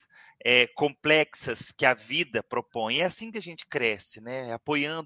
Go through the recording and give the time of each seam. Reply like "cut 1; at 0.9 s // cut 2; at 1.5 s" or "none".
none